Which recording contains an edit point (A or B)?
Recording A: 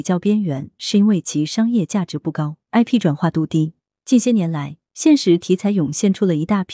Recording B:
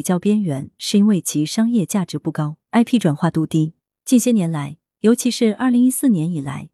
A